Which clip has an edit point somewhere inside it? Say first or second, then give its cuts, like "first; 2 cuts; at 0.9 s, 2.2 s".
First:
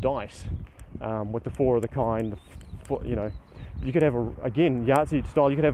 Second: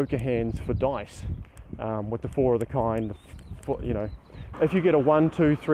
second; 1 cut; at 4.5 s